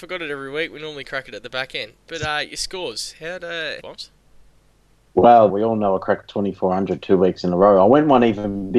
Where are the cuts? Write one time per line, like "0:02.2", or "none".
0:03.8
0:05.5